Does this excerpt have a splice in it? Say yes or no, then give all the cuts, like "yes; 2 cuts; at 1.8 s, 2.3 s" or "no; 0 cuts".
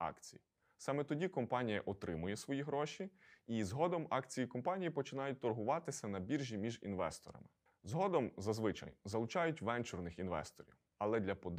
yes; 1 cut; at 7.7 s